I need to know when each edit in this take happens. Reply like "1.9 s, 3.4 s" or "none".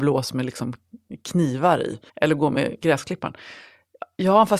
2.1 s